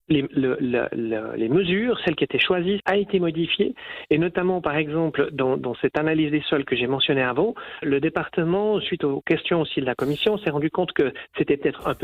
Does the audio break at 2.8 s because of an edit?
yes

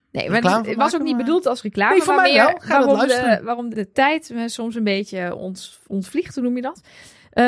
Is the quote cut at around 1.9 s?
no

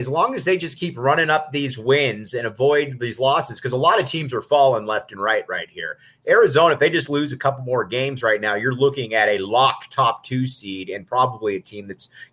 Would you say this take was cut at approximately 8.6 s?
no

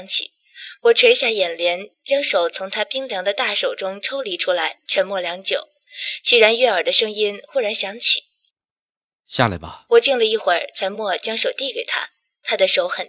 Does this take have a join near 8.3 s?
no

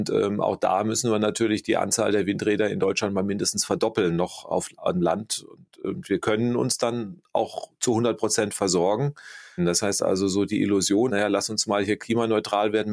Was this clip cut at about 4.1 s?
no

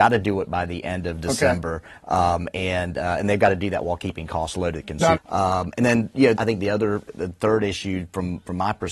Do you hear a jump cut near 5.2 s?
yes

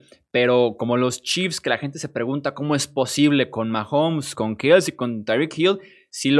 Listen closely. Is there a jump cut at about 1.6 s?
no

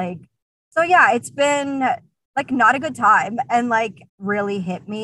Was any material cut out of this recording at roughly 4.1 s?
yes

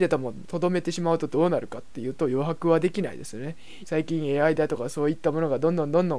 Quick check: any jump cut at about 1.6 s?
no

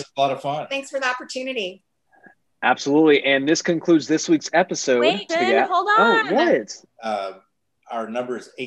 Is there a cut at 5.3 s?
yes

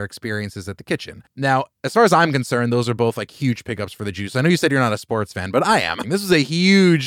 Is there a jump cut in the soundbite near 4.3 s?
no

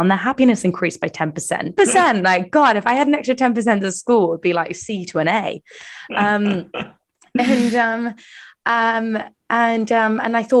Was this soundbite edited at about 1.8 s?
yes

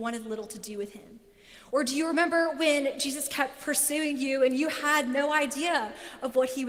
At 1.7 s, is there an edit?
no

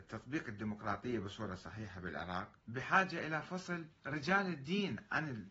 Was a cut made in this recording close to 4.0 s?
yes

